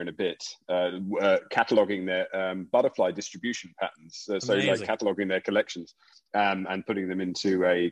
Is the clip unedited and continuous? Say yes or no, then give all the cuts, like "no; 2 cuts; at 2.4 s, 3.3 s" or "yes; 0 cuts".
yes; 0 cuts